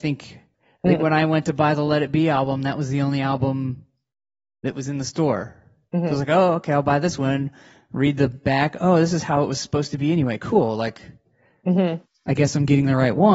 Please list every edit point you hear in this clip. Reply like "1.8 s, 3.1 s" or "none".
none